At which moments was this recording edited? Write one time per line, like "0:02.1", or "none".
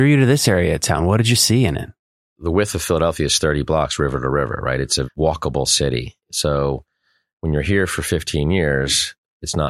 0:05.0